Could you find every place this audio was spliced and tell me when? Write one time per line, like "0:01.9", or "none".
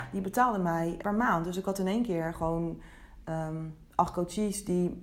0:01.0